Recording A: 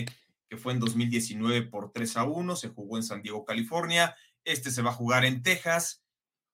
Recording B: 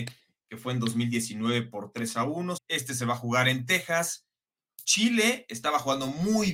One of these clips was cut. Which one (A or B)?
B